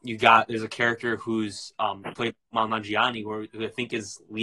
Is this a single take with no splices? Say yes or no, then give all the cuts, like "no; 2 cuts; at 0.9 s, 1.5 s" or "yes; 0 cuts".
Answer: yes; 0 cuts